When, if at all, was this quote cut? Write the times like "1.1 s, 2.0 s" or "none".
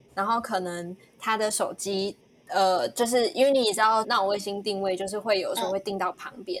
4.0 s